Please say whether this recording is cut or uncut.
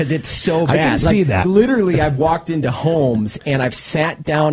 cut